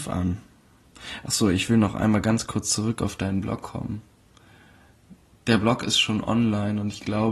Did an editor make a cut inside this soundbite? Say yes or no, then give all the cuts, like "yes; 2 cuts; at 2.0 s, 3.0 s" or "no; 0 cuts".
no; 0 cuts